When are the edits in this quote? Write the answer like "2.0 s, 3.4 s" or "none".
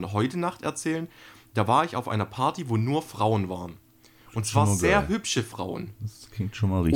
none